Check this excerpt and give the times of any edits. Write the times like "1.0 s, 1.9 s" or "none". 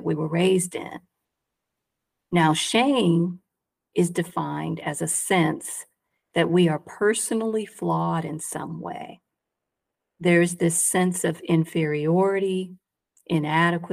none